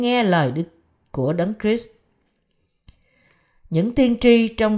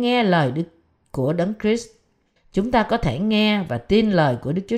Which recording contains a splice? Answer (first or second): second